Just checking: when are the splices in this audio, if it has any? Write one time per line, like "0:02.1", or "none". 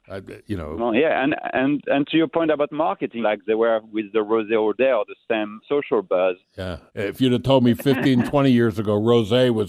0:03.2
0:05.6
0:06.9